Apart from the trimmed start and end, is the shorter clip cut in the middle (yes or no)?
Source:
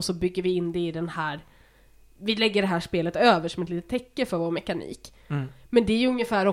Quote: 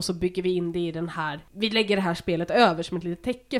yes